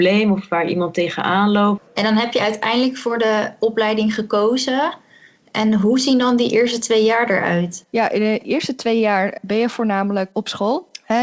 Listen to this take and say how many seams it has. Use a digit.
1